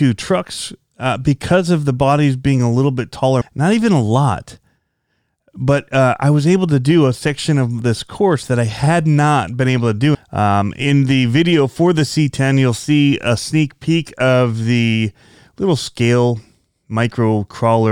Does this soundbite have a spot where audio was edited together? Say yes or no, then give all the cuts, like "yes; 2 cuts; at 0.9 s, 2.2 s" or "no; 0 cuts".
yes; 2 cuts; at 3.4 s, 10.1 s